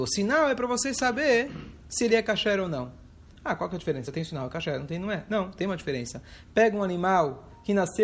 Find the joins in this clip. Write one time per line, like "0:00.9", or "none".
none